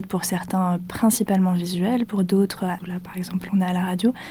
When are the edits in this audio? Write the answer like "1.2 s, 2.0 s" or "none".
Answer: 2.8 s